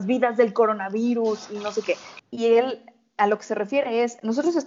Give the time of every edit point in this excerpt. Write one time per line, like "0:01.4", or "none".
0:02.2